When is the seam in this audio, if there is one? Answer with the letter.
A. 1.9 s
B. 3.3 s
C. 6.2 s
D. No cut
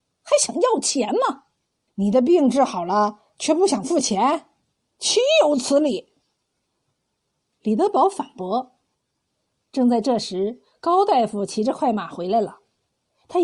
A